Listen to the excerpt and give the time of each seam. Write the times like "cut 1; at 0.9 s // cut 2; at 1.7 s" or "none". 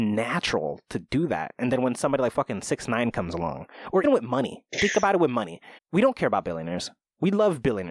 cut 1; at 4.0 s // cut 2; at 5.8 s